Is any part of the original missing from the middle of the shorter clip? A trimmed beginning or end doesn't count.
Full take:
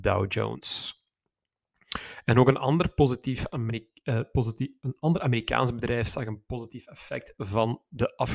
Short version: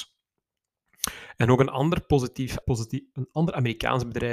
yes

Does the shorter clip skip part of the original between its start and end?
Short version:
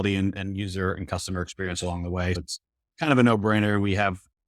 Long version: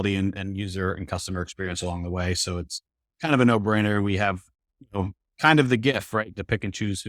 yes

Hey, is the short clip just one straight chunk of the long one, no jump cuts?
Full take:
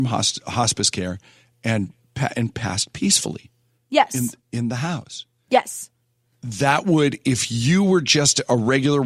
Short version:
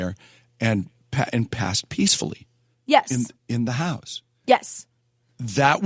yes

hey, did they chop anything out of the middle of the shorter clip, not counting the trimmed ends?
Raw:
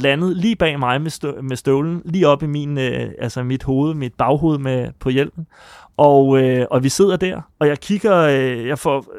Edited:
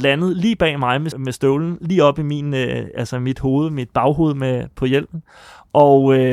yes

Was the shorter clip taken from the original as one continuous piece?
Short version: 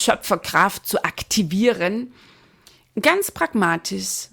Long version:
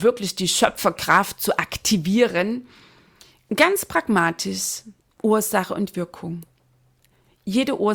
yes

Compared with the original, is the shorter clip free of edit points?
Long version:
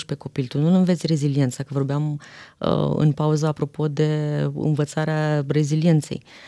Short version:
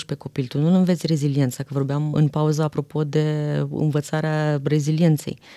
no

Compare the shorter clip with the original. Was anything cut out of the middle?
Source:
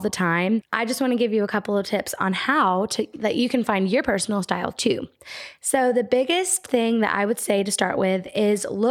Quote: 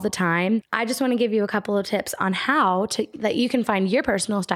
no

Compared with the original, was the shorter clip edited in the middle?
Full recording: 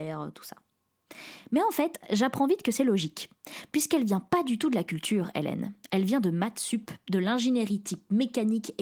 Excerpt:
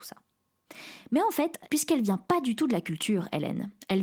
yes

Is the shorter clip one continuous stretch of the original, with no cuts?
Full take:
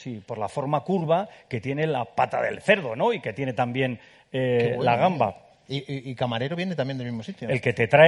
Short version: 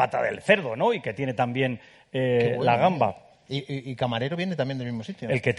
yes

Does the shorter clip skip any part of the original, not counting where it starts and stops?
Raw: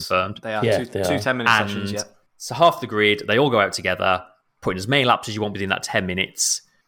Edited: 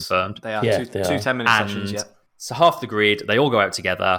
no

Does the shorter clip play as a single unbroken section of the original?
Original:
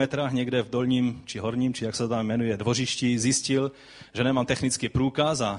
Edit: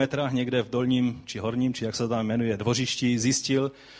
yes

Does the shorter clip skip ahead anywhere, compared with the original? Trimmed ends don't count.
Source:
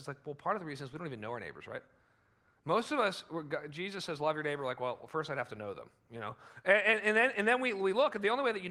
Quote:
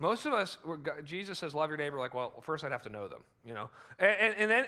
no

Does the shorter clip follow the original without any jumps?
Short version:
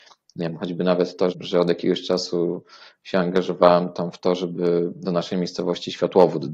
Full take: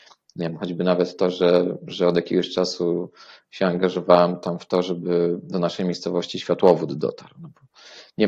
no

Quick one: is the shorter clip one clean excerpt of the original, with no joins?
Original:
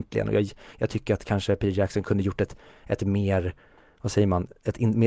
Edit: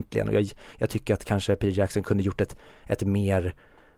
yes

